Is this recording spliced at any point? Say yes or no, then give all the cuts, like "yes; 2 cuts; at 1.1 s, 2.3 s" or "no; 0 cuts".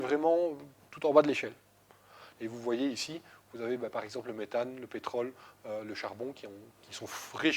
yes; 1 cut; at 2.3 s